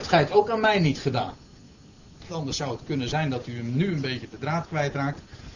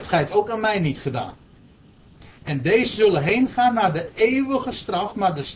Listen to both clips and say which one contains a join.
first; 1 cut; at 2.3 s

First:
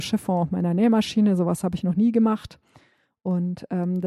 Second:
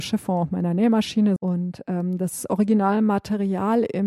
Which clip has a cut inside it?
second; 1 cut; at 1.4 s

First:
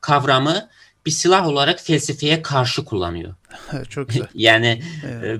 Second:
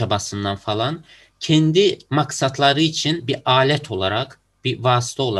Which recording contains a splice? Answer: first; 1 cut; at 3.4 s

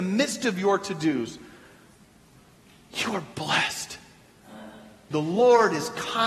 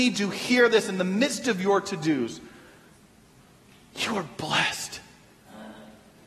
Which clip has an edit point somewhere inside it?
first; 1 cut; at 5.1 s

